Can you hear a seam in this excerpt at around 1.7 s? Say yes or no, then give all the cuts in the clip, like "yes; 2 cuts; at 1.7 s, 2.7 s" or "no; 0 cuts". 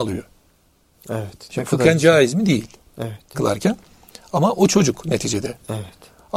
no; 1 cut; at 3.3 s